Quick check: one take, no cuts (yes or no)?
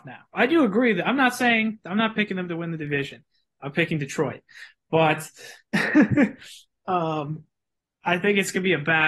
yes